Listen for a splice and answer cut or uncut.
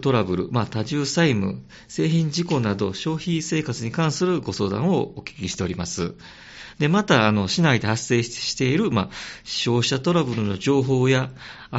uncut